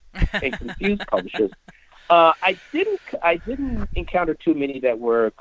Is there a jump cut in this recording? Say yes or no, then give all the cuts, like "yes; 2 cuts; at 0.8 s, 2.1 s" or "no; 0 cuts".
no; 0 cuts